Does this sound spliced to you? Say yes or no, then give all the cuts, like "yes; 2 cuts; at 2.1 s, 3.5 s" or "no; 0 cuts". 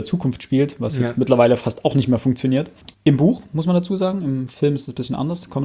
yes; 1 cut; at 2.9 s